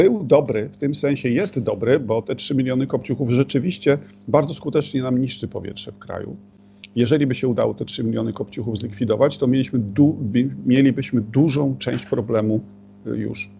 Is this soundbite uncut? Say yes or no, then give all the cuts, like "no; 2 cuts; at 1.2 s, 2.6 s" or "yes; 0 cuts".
yes; 0 cuts